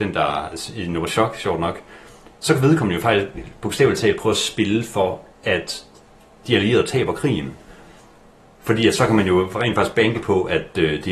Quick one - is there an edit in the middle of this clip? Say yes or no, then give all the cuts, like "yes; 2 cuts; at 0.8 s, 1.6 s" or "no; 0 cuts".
no; 0 cuts